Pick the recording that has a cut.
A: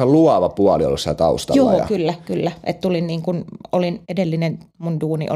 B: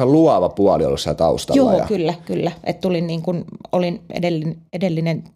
A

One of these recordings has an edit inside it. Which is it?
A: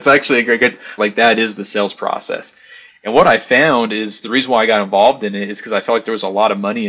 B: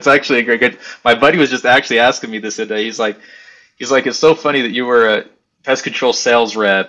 A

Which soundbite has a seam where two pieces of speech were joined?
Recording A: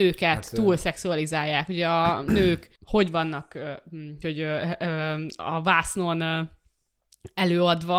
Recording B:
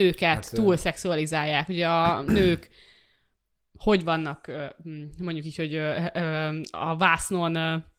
A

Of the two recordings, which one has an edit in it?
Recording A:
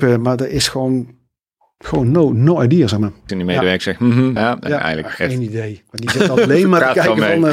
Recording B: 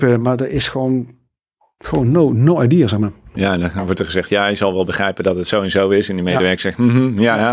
A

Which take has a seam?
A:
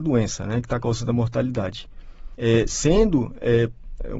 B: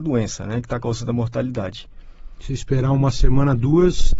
A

